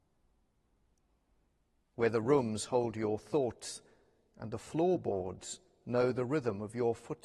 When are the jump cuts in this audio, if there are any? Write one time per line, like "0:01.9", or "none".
0:01.8